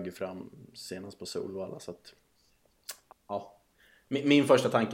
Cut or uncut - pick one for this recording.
cut